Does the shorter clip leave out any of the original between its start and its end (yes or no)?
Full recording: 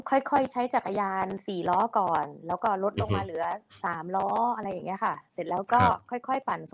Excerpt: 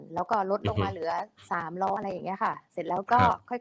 yes